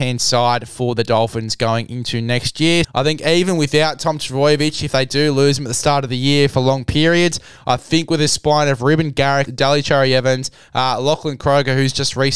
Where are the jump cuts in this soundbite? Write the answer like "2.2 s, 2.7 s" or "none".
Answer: 2.8 s, 9.5 s

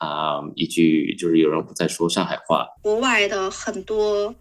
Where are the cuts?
2.8 s

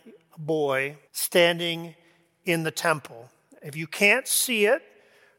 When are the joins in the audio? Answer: 1.1 s

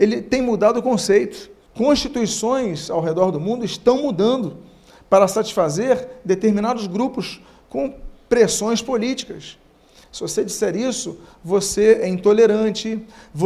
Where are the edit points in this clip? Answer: 1.7 s, 10.0 s

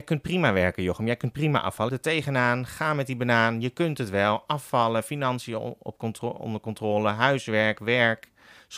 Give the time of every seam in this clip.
1.9 s

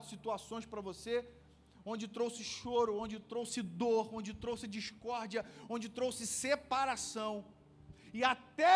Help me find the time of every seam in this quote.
none

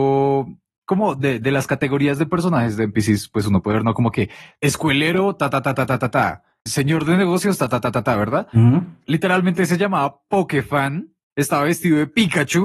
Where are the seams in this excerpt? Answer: none

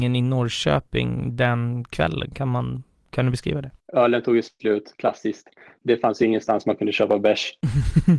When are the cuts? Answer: 3.8 s

